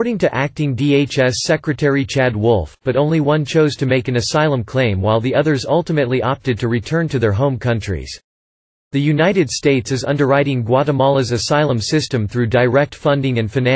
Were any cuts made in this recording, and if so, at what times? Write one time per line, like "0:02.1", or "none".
0:02.8